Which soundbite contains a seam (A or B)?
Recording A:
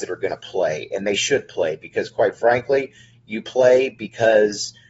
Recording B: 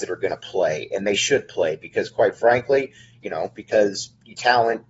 B